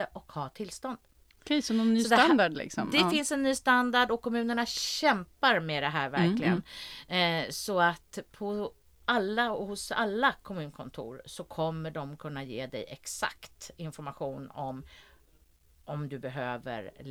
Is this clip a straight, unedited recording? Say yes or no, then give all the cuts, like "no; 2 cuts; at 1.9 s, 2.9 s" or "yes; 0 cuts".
yes; 0 cuts